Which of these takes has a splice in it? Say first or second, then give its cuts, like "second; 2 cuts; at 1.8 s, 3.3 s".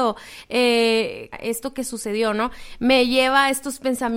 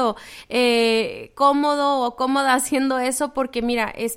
first; 1 cut; at 1.3 s